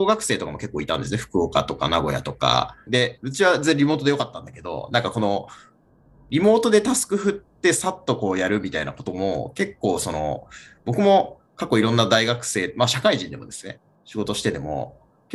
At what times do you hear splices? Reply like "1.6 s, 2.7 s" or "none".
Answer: 2.9 s